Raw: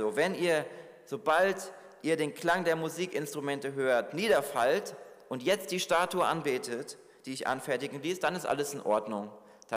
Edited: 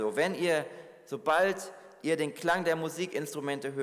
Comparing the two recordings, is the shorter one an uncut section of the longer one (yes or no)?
yes